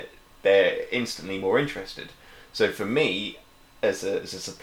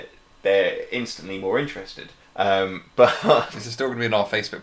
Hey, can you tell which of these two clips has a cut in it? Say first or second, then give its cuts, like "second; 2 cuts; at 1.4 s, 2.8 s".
second; 1 cut; at 2.2 s